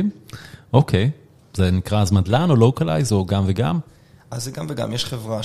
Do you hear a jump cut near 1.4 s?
yes; 1 cut; at 1.4 s

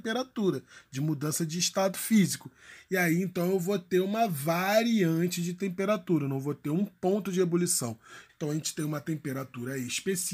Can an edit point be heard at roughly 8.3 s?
yes; 1 cut; at 8.3 s

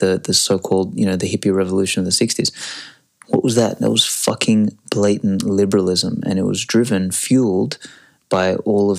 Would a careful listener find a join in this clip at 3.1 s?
no; 0 cuts

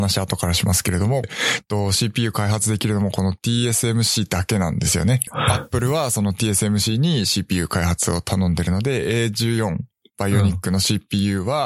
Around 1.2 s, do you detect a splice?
yes; 2 cuts; at 1.2 s, 5.3 s

